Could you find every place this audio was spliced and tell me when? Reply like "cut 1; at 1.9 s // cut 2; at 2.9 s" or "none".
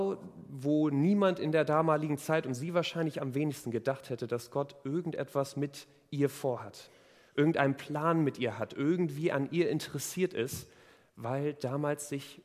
none